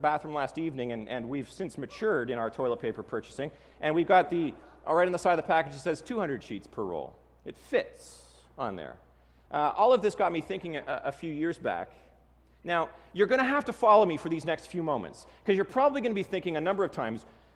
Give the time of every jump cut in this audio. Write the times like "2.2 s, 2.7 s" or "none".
9.5 s